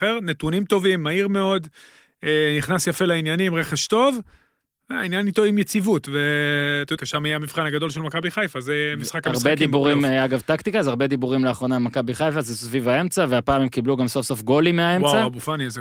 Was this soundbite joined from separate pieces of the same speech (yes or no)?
yes